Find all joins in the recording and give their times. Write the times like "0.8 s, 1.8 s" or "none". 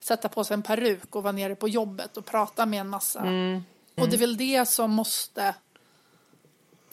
4.0 s